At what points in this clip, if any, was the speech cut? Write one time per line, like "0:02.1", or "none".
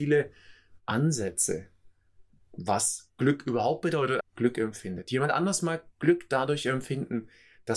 0:04.2